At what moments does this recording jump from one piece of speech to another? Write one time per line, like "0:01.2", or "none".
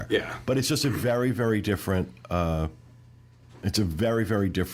none